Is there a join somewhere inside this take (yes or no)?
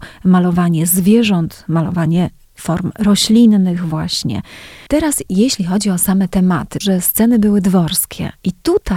yes